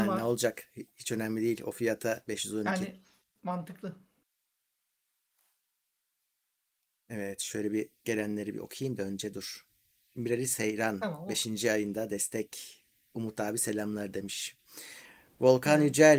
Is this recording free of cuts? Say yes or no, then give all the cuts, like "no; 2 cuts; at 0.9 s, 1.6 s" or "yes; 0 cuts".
yes; 0 cuts